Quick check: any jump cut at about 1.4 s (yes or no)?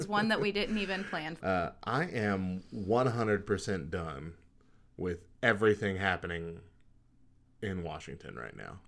yes